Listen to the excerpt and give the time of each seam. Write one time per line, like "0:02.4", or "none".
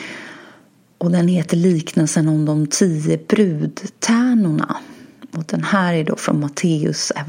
none